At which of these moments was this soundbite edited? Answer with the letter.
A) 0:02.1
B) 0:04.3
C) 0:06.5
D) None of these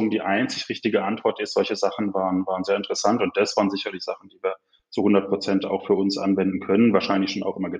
D